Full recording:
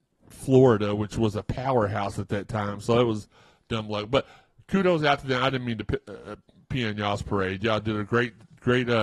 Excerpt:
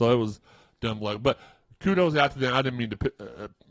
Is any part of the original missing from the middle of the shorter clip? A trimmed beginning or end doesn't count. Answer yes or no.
no